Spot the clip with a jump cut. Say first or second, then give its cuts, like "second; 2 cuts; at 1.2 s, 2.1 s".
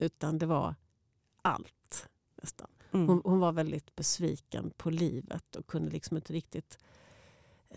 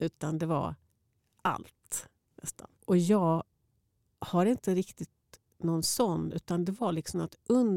second; 1 cut; at 2.8 s